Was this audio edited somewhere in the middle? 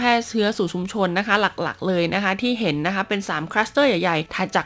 no; 0 cuts

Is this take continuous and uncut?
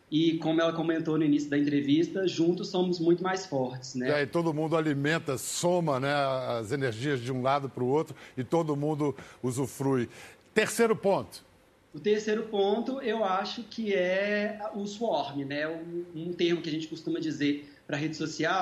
yes; 0 cuts

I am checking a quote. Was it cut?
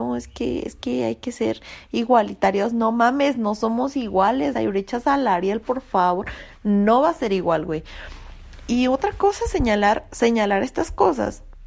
yes; 1 cut; at 4.5 s

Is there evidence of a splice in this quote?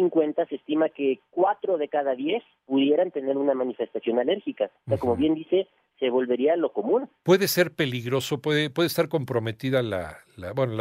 no; 0 cuts

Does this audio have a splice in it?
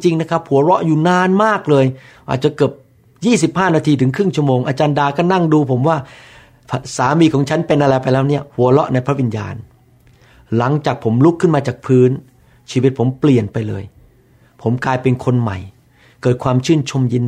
no; 0 cuts

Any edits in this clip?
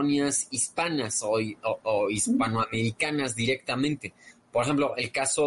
no; 0 cuts

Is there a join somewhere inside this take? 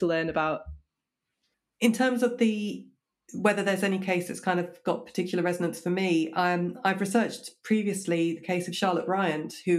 no; 0 cuts

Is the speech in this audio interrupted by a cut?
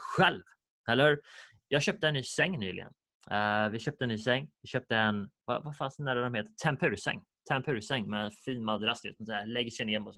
no; 0 cuts

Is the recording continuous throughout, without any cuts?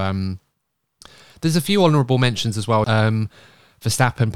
no; 1 cut; at 2.8 s

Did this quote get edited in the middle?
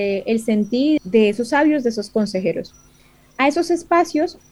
yes; 1 cut; at 1.0 s

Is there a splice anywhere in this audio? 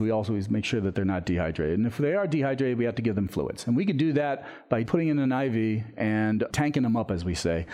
yes; 2 cuts; at 4.9 s, 6.5 s

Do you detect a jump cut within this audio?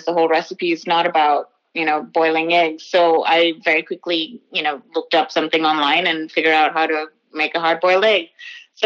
no; 0 cuts

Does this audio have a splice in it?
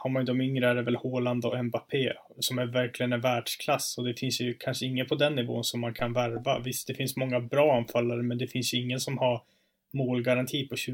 no; 0 cuts

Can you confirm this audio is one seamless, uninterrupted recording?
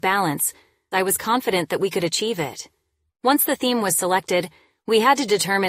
no; 2 cuts; at 0.9 s, 3.1 s

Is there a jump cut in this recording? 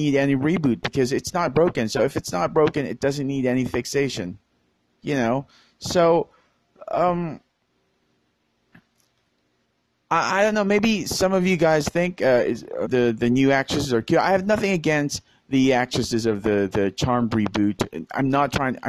yes; 1 cut; at 12.8 s

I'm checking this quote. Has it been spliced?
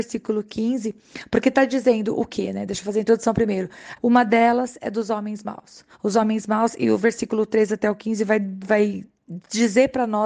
yes; 1 cut; at 4.0 s

